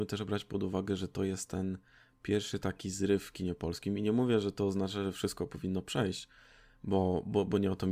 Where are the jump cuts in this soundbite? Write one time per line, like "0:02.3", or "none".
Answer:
none